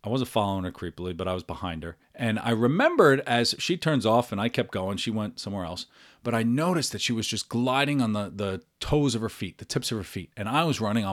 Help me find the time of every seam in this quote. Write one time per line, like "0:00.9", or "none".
0:02.0